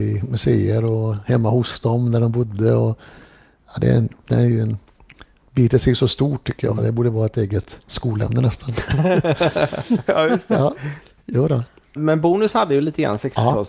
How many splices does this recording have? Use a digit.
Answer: 2